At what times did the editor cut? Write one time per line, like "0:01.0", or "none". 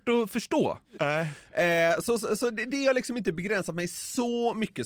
0:01.0